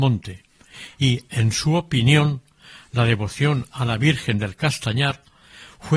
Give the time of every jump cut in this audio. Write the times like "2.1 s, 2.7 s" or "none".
none